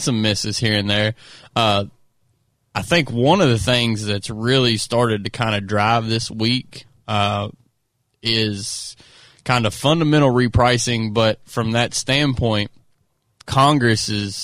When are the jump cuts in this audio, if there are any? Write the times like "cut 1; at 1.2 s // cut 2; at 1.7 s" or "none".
cut 1; at 13.4 s